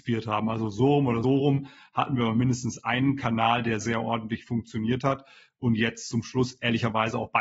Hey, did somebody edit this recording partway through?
yes; 2 cuts; at 1.2 s, 3.8 s

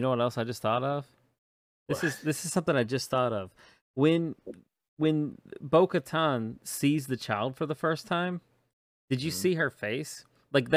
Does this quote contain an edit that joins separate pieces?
no; 0 cuts

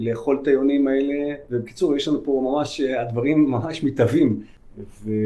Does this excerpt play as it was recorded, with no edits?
yes; 0 cuts

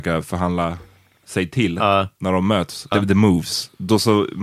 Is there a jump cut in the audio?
yes; 1 cut; at 2.9 s

